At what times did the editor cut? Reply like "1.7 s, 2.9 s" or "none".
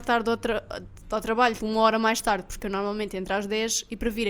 1.6 s